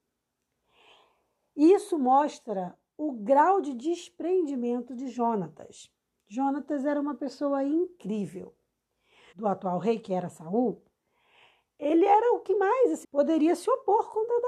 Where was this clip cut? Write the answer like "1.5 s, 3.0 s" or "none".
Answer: 9.3 s, 13.0 s